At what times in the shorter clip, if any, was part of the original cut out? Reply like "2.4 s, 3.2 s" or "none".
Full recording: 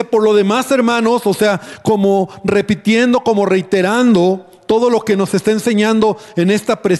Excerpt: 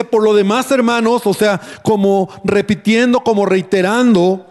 none